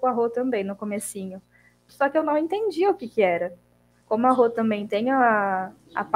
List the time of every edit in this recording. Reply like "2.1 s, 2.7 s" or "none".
1.9 s, 4.0 s